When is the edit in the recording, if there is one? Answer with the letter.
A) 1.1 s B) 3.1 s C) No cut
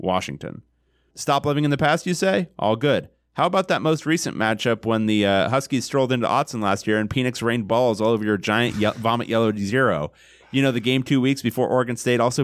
A